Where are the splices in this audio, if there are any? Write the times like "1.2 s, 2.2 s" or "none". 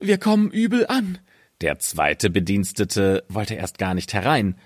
1.5 s